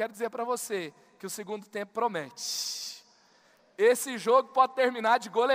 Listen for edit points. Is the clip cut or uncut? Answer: uncut